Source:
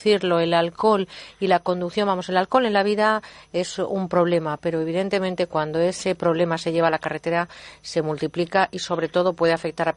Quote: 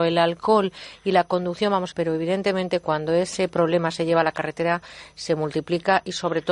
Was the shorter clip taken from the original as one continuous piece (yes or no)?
no